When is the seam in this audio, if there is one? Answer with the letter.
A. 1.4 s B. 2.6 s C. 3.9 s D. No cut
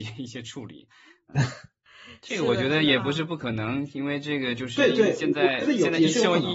A